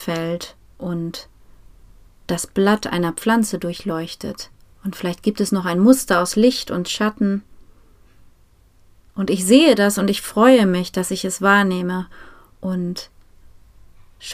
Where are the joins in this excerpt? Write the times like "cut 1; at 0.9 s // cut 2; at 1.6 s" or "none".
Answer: cut 1; at 4.6 s